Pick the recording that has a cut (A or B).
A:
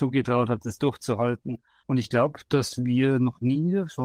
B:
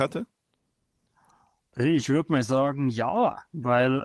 A